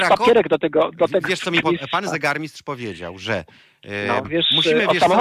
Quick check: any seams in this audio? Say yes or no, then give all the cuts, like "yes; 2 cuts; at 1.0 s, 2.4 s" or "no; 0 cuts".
yes; 2 cuts; at 1.6 s, 4.2 s